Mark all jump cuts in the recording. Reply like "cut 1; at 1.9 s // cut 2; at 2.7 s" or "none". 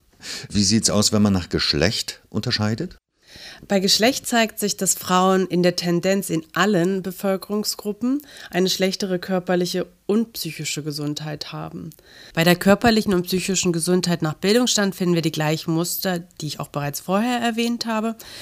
cut 1; at 12.3 s